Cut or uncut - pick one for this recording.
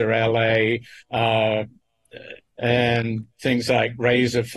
cut